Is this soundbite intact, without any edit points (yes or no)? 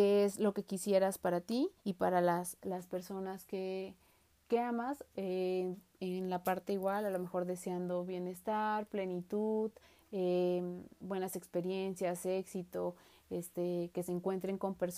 no